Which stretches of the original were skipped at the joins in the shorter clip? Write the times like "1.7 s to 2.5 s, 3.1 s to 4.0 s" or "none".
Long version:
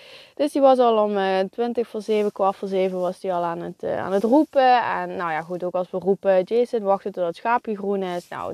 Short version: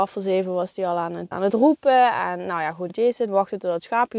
3.8 s to 4.0 s, 5.6 s to 6.4 s

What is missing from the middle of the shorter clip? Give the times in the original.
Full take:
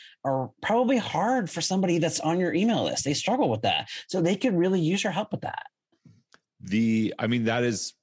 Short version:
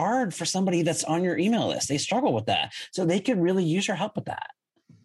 none

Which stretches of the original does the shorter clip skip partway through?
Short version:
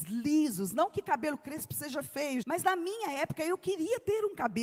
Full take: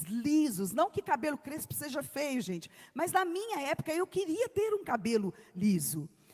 2.4 s to 2.9 s

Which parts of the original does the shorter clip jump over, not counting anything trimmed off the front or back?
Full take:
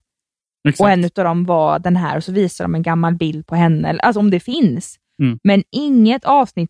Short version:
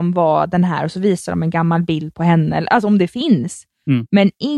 none

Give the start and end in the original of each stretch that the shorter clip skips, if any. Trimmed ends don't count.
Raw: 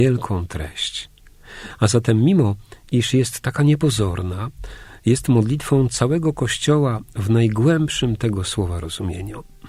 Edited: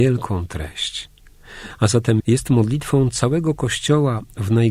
2.2 s to 5.0 s

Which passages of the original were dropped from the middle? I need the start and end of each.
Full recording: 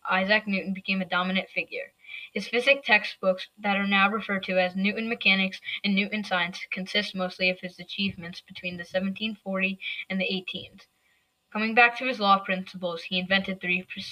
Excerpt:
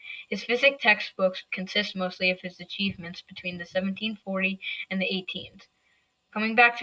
3.5 s to 6.7 s

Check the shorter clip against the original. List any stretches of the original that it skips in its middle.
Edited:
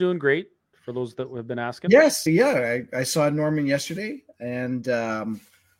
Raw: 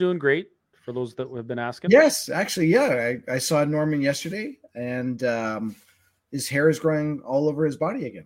2.3 s to 2.6 s

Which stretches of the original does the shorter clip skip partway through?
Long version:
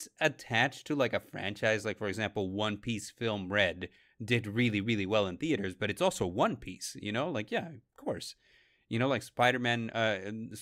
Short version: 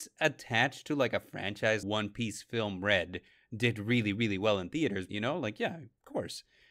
1.8 s to 2.5 s, 5.8 s to 7.0 s

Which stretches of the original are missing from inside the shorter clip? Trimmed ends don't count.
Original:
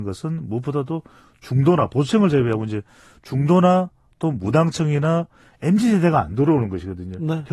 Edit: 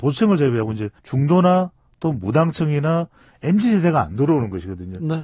2.9 s to 3.2 s

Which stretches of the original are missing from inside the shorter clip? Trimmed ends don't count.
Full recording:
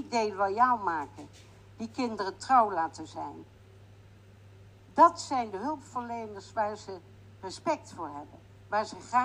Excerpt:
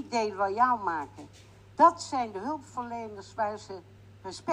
1.8 s to 4.9 s

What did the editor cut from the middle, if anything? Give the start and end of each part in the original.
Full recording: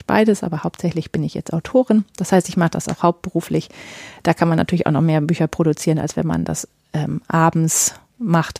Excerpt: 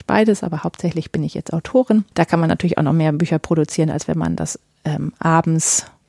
2.1 s to 4.2 s

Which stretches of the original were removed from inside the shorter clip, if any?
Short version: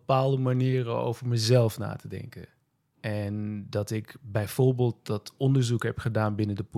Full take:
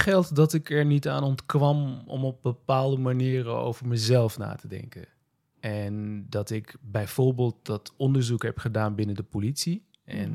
none

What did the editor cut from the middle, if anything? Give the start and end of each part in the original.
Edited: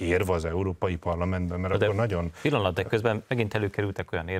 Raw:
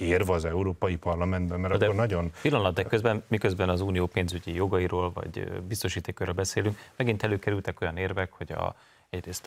3.2 s to 6.9 s

